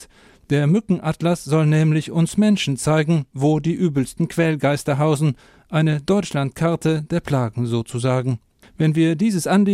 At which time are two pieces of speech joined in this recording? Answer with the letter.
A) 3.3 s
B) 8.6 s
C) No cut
B